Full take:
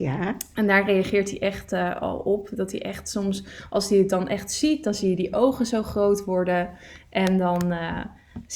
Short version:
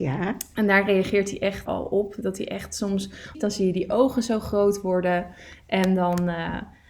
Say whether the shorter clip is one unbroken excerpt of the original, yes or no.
no